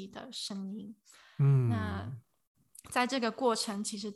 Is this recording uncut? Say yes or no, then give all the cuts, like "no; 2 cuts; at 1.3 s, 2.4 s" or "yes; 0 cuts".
yes; 0 cuts